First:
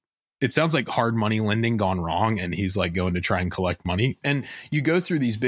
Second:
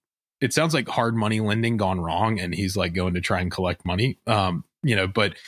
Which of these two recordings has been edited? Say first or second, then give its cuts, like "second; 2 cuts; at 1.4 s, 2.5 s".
first; 1 cut; at 4.2 s